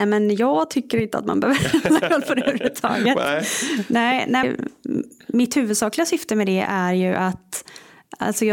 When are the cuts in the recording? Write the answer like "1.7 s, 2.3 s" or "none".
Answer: 4.4 s